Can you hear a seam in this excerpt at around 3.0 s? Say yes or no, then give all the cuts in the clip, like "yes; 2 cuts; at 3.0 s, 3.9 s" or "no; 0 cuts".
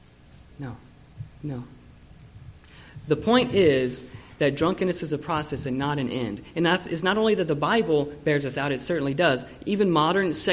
no; 0 cuts